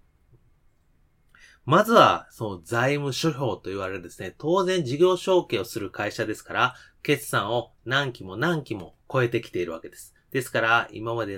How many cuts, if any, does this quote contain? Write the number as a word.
one